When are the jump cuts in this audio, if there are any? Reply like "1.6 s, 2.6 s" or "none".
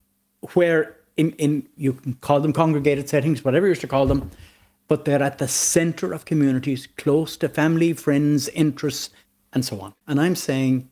10.0 s